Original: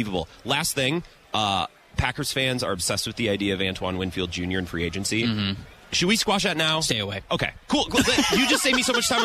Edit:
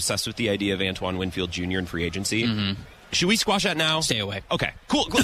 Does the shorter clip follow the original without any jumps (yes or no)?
yes